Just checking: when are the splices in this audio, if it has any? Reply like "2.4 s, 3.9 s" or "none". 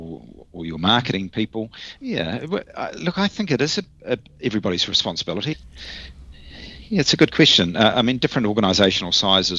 2.0 s, 5.5 s